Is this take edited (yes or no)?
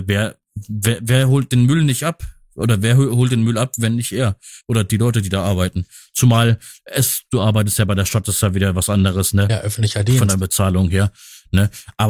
no